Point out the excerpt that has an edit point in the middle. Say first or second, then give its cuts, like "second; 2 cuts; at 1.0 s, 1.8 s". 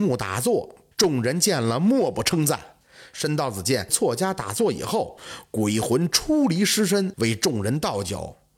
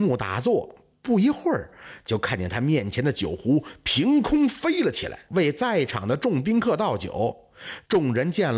first; 1 cut; at 0.9 s